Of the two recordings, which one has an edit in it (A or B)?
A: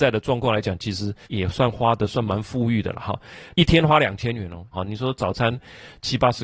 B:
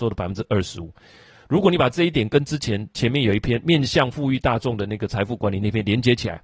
A